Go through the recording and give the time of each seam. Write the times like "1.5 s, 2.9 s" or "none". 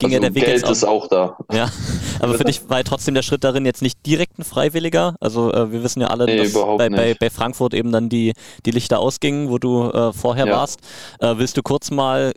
6.3 s